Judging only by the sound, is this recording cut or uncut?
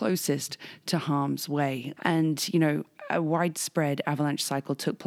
cut